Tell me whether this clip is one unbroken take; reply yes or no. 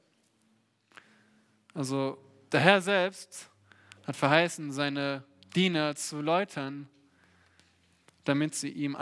yes